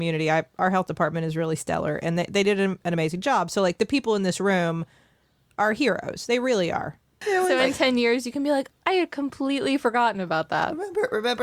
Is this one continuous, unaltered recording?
no; 2 cuts; at 7.2 s, 8.7 s

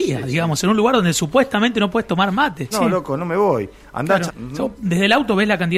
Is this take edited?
yes; 2 cuts; at 2.7 s, 4.3 s

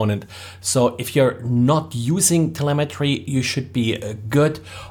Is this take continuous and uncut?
yes; 0 cuts

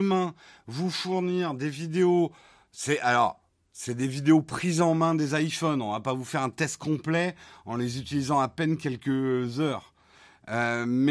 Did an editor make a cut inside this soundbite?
no; 0 cuts

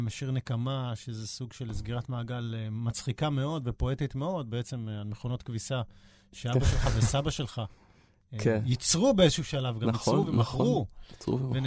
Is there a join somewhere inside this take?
no; 0 cuts

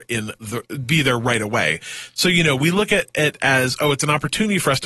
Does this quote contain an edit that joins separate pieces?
no; 0 cuts

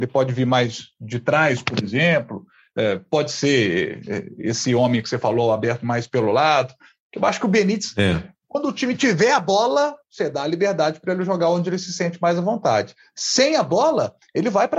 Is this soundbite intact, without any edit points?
yes; 0 cuts

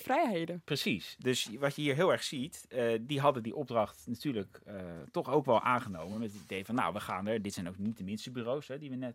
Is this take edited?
no; 0 cuts

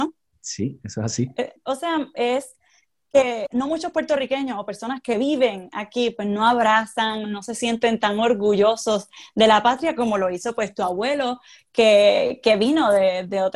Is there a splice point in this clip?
yes; 2 cuts; at 1.6 s, 7.2 s

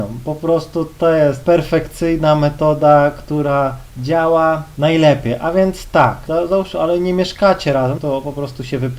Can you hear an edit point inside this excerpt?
yes; 2 cuts; at 6.3 s, 8.0 s

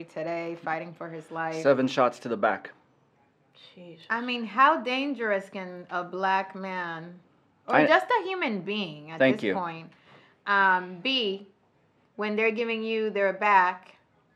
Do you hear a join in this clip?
no; 0 cuts

